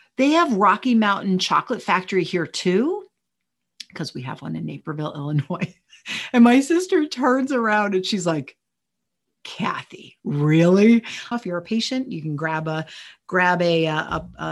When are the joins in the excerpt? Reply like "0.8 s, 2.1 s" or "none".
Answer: 11.3 s